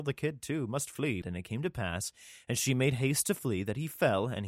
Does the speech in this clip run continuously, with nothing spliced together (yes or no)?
no